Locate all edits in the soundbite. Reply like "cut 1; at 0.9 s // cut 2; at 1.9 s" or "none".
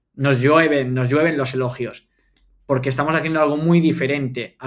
none